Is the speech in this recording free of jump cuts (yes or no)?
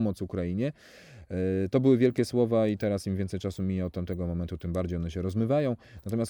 yes